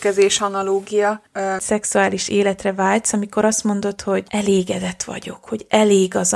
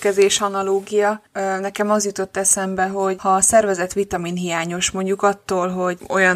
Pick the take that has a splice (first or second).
first